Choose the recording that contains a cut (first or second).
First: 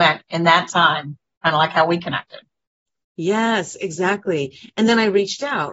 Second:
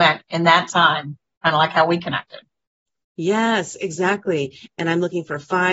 second